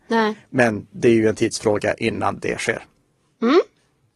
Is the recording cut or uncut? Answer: uncut